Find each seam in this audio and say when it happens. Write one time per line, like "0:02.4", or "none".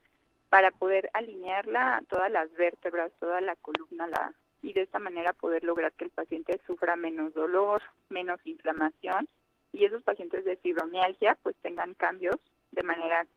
0:04.6

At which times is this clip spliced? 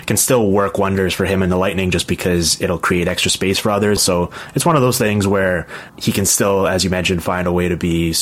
0:04.0
0:05.9

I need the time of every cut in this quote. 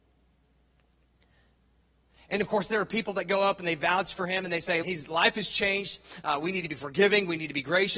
0:04.8

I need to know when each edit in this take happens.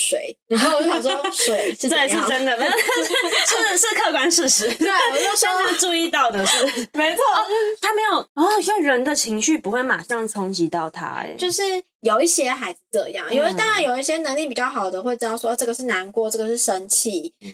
none

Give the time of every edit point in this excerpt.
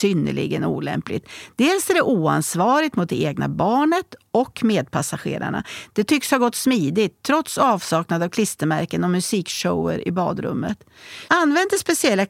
0:05.9
0:11.3

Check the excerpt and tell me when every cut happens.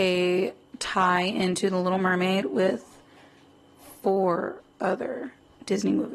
none

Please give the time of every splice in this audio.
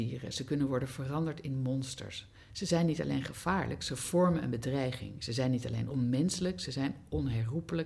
none

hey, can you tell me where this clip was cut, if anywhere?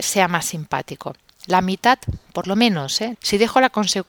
0:01.3
0:03.1

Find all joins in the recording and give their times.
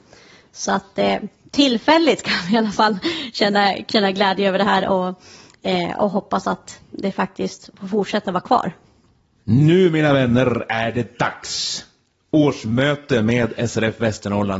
none

